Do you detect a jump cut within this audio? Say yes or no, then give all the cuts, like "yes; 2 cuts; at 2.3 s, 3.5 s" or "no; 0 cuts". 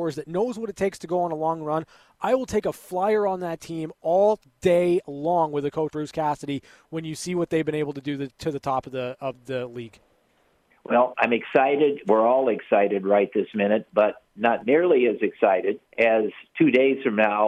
yes; 3 cuts; at 5.9 s, 11.1 s, 15.9 s